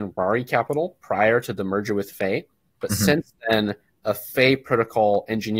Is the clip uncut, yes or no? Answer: yes